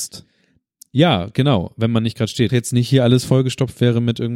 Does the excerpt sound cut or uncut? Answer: cut